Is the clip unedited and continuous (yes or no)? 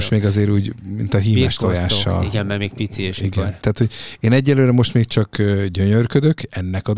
no